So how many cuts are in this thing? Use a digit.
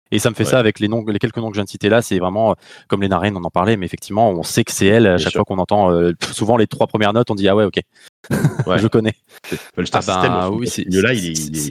1